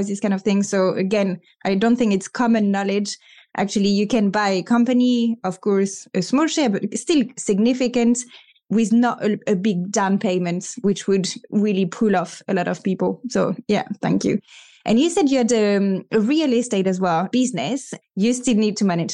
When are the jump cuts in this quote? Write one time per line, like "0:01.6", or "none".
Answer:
0:18.0

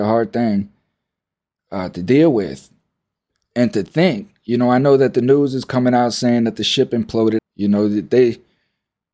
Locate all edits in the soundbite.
0:07.4

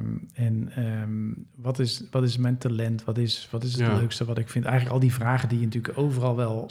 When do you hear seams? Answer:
none

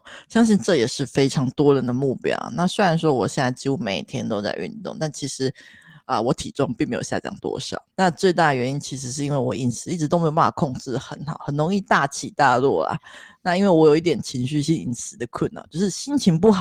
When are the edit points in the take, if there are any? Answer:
0:07.9

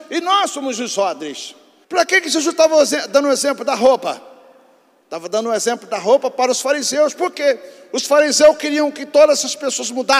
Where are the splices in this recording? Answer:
0:01.8

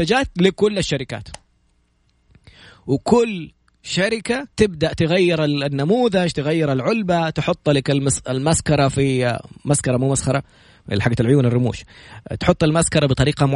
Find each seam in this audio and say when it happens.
0:04.5

